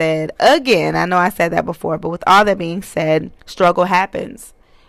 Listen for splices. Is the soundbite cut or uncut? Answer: cut